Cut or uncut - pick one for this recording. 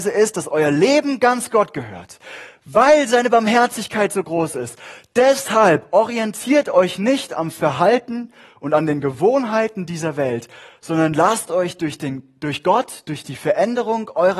uncut